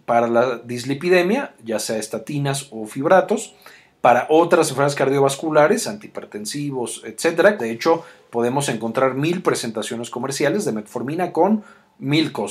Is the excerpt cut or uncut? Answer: cut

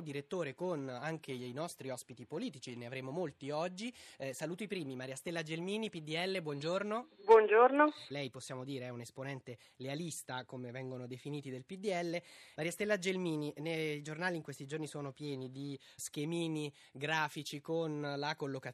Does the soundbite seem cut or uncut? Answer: cut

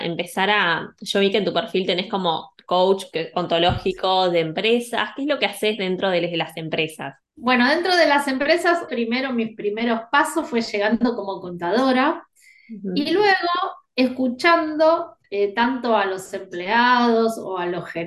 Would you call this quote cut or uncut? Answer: cut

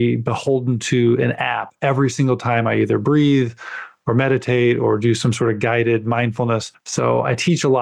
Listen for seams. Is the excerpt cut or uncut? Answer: cut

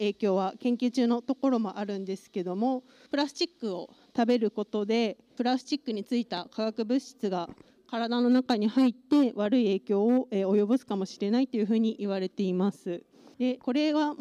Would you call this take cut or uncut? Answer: uncut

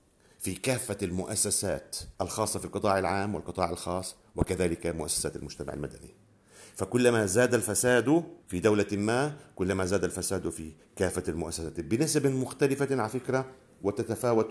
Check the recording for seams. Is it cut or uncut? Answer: cut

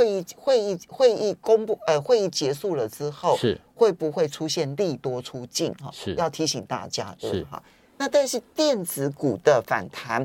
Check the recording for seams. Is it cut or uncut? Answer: uncut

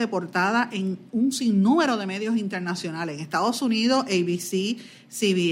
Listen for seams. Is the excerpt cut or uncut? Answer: uncut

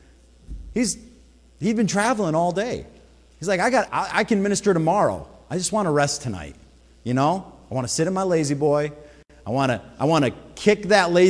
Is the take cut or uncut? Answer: cut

